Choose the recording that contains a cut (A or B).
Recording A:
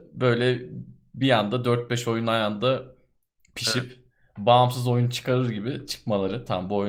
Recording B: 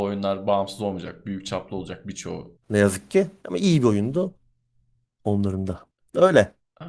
B